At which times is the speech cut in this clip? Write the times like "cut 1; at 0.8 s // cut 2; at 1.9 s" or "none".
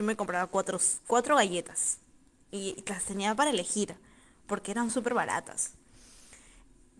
none